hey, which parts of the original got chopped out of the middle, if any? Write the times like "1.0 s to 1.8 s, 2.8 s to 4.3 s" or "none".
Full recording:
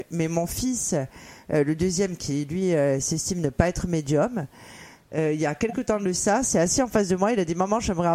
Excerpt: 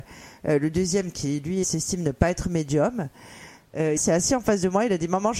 2.7 s to 3.0 s, 5.3 s to 6.4 s